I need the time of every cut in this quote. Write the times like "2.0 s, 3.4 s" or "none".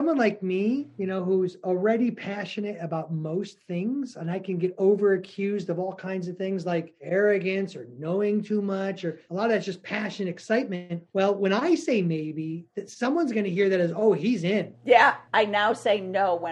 15.3 s